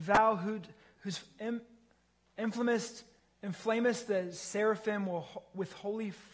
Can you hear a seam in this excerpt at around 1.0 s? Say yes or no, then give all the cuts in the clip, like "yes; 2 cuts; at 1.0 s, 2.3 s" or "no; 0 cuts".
yes; 1 cut; at 1.0 s